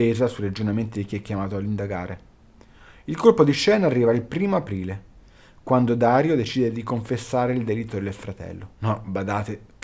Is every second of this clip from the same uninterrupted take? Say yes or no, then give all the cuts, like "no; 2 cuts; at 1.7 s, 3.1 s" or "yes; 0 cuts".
no; 1 cut; at 8.7 s